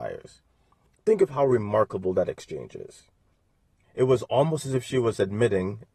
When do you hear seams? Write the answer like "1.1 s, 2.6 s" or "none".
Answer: 0.9 s, 3.8 s